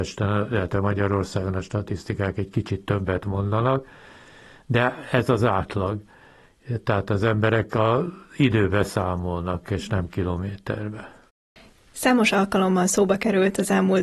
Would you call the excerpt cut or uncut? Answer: uncut